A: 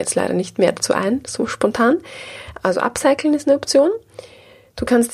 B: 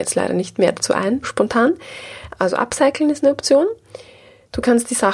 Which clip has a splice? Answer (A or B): B